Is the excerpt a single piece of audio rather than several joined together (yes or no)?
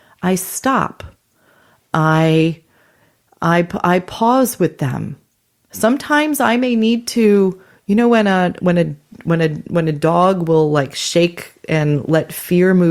no